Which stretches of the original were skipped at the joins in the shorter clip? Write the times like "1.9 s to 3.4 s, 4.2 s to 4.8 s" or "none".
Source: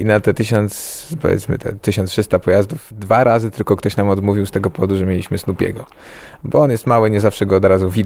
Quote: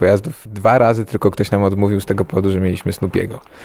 none